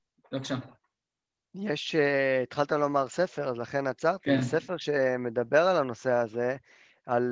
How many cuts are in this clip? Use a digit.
0